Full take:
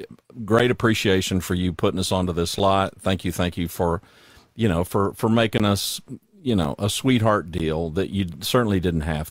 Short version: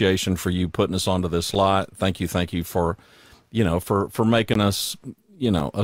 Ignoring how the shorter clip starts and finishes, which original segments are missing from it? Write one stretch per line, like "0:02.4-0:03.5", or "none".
none